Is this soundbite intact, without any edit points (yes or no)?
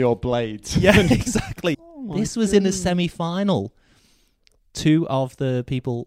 no